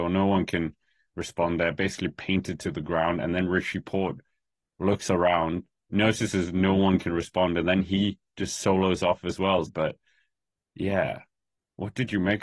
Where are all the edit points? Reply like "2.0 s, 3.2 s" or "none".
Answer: 9.7 s